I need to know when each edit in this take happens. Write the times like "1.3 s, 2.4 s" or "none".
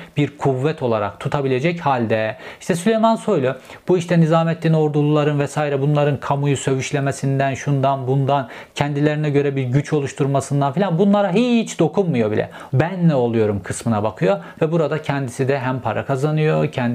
12.7 s